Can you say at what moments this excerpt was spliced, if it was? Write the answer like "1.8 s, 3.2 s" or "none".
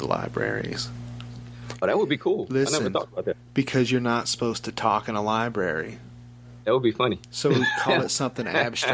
none